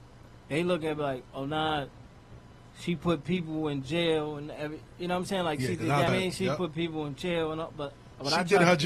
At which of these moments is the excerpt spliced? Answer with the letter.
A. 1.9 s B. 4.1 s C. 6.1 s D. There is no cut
C